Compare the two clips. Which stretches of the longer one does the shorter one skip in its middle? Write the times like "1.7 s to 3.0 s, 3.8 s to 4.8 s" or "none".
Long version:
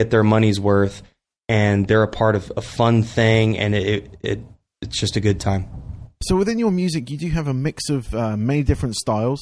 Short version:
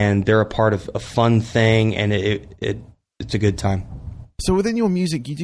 4.9 s to 5.1 s